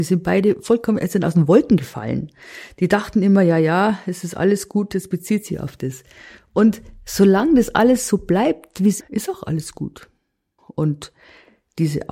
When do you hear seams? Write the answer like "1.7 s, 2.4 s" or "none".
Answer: 9.0 s, 10.6 s